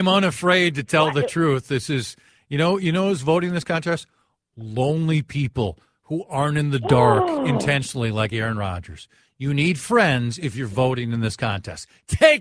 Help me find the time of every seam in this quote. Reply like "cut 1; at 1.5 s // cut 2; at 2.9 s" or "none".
none